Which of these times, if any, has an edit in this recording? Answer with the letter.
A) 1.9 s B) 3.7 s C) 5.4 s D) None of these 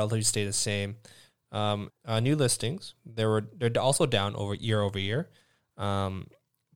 A